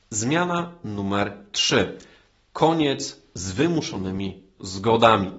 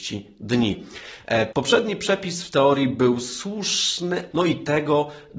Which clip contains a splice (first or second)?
second